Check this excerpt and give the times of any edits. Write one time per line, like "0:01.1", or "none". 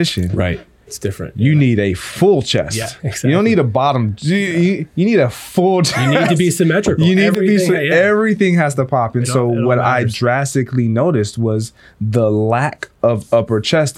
0:03.0